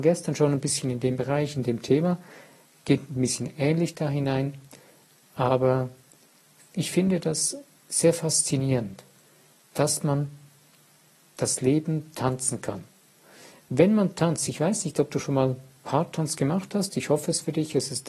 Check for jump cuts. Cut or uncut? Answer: uncut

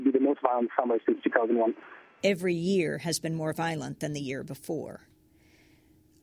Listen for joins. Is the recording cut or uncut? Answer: uncut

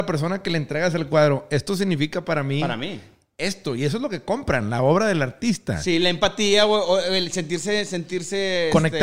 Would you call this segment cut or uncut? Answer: uncut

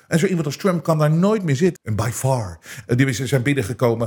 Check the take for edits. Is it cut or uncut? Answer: cut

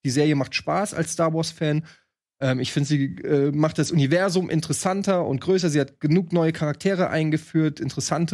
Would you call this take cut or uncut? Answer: uncut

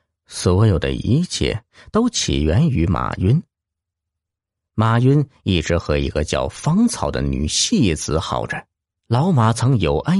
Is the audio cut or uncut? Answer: cut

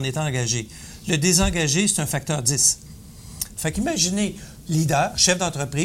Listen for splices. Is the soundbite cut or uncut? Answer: cut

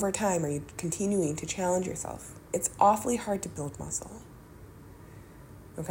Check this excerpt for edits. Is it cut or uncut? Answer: cut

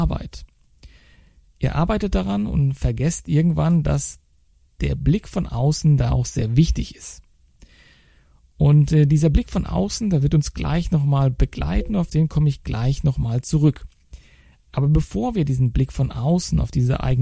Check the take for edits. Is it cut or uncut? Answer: uncut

